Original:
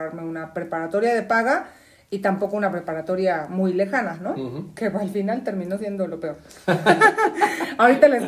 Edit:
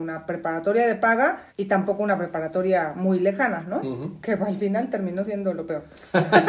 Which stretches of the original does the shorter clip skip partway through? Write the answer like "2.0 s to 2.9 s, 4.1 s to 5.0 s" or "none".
1.8 s to 2.0 s